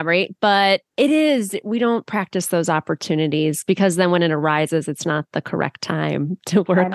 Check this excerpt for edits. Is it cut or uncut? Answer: cut